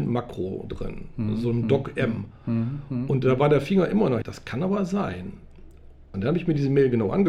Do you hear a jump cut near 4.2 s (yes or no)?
yes